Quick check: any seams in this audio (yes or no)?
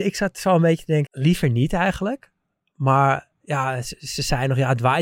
yes